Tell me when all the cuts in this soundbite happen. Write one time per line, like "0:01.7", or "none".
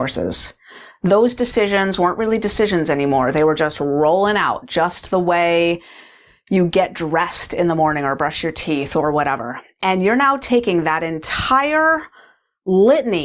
none